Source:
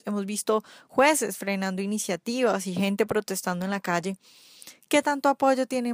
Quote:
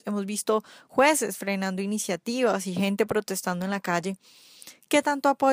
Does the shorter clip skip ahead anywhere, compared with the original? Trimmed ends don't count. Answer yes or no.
no